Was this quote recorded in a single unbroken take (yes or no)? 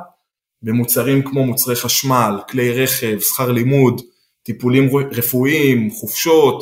yes